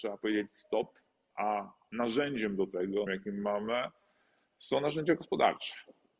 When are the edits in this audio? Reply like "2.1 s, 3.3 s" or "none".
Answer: 3.1 s